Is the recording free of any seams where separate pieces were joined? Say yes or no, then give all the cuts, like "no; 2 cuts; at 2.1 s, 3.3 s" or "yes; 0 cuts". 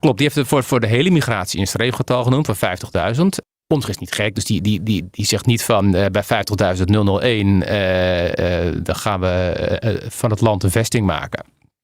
yes; 0 cuts